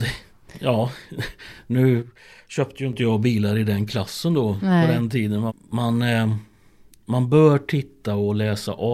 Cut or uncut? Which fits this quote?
cut